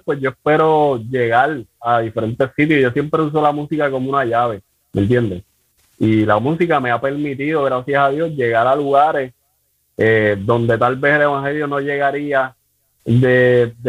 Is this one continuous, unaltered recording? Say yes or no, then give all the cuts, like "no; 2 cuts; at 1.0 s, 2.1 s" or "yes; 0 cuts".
yes; 0 cuts